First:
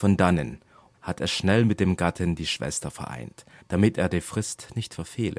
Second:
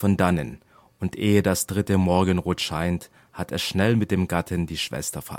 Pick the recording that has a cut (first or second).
first